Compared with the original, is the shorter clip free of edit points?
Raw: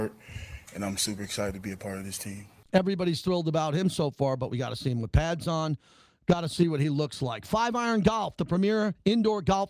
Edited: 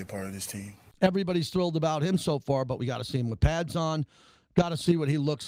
yes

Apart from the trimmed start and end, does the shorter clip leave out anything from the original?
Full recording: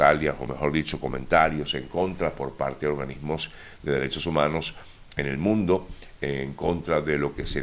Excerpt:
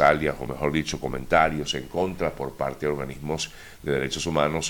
no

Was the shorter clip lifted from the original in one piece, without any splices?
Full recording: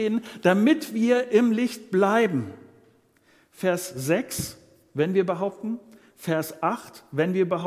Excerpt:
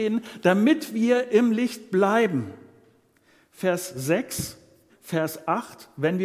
no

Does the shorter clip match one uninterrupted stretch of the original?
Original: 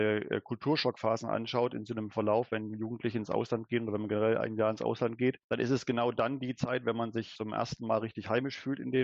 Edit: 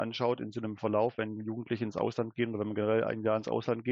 yes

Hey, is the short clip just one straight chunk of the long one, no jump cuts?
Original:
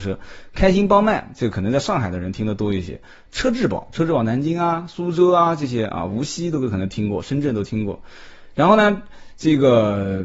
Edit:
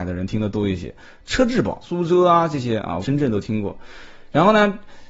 no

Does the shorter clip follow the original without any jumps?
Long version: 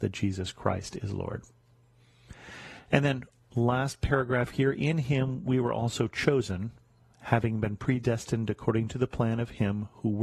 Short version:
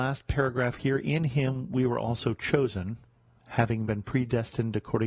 yes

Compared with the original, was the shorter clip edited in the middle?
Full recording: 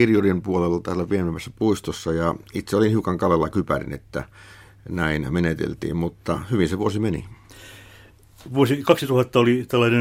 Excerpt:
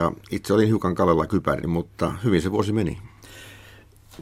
yes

